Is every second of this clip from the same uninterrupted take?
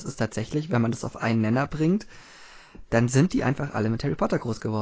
yes; 0 cuts

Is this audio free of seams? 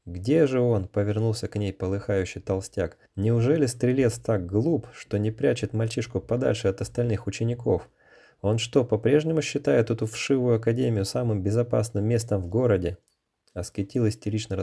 no; 1 cut; at 3.1 s

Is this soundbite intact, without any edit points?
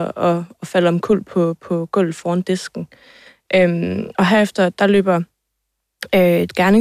yes; 0 cuts

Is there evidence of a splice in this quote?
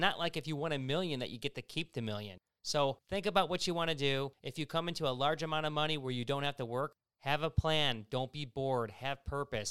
no; 0 cuts

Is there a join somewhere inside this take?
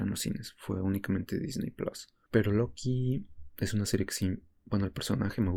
no; 0 cuts

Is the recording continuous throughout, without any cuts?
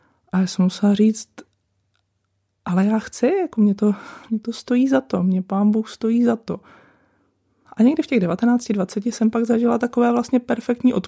no; 1 cut; at 7.6 s

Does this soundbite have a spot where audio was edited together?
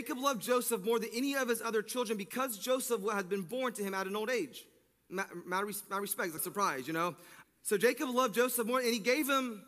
yes; 2 cuts; at 6.4 s, 7.4 s

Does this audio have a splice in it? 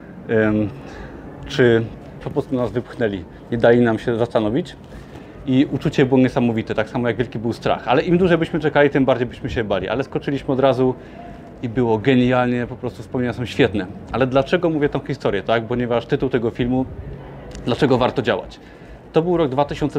yes; 1 cut; at 2.2 s

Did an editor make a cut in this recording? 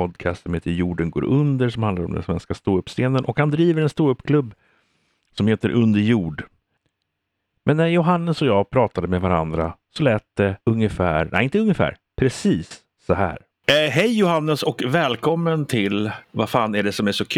yes; 1 cut; at 10.6 s

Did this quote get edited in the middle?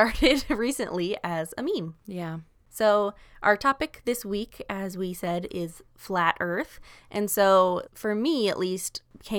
yes; 1 cut; at 7.9 s

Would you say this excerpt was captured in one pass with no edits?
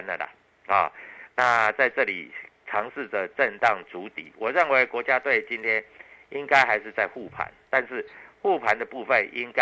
yes; 0 cuts

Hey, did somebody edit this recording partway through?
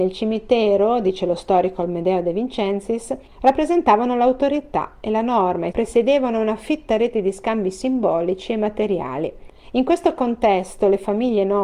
yes; 1 cut; at 5.7 s

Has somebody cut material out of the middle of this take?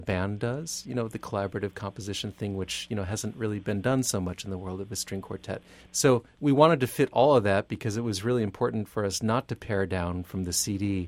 yes; 1 cut; at 5.9 s

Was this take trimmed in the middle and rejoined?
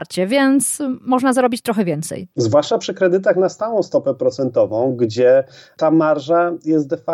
yes; 1 cut; at 2.3 s

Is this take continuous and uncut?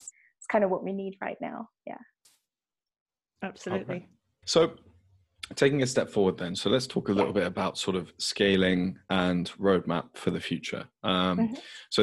no; 1 cut; at 4.4 s

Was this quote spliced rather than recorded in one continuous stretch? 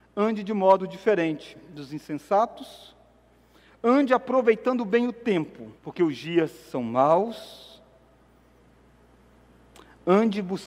yes; 1 cut; at 5.8 s

